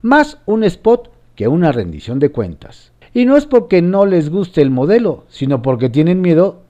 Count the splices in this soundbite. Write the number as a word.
one